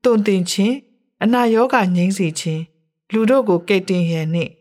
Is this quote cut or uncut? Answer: uncut